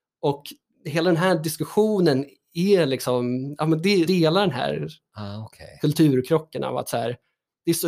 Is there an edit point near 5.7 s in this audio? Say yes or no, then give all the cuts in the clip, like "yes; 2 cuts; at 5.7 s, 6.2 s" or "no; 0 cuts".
no; 1 cut; at 4.1 s